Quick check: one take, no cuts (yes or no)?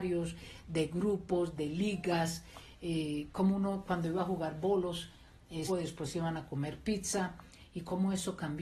no